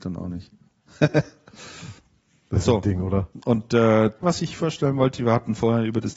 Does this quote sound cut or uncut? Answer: cut